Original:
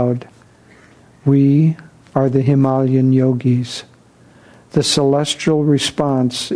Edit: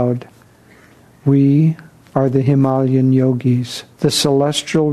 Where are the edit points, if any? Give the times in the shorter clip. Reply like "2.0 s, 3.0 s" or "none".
3.9 s